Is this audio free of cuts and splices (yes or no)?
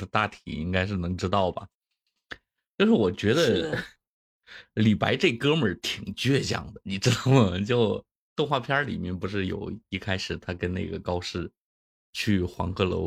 yes